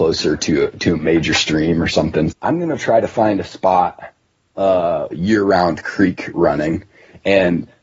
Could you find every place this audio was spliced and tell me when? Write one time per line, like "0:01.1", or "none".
0:02.3
0:05.1